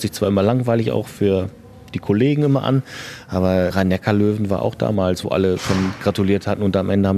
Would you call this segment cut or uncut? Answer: uncut